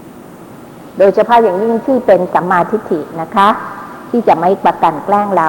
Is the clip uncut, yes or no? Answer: no